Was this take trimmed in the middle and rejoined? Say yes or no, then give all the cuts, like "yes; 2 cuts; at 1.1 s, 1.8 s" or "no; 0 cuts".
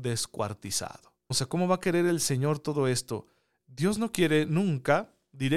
yes; 1 cut; at 1.3 s